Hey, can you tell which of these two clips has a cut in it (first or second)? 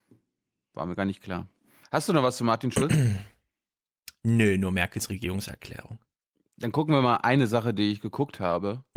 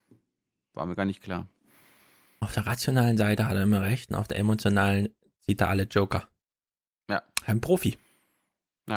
first